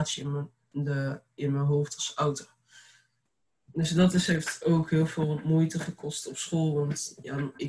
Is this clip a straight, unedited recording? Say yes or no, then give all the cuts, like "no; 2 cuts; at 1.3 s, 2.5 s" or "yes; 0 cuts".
yes; 0 cuts